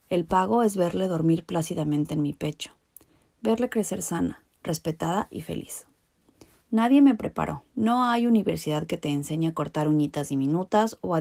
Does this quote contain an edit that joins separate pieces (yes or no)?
yes